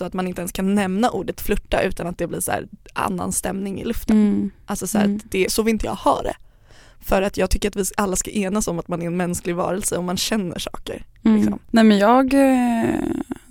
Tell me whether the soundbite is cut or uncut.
cut